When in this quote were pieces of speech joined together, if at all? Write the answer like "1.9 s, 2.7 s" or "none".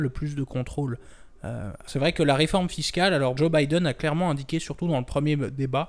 1.9 s, 3.4 s